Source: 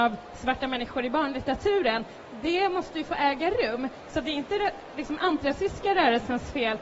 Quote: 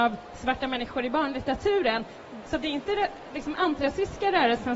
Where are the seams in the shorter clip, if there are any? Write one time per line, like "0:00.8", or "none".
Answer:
0:02.4